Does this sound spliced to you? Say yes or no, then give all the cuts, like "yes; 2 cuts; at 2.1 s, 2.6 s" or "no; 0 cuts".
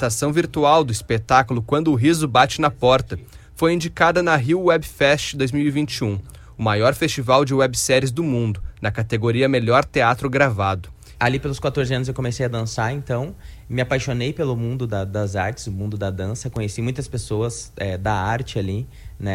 yes; 1 cut; at 11.1 s